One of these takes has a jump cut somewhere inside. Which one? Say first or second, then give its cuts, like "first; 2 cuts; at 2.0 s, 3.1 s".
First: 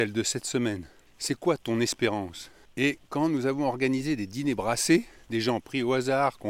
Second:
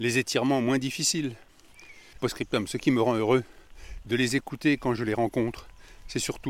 second; 2 cuts; at 2.1 s, 4.0 s